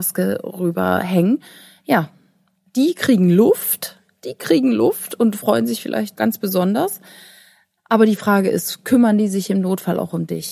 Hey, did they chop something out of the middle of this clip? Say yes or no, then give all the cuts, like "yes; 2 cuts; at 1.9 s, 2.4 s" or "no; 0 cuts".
yes; 1 cut; at 6.2 s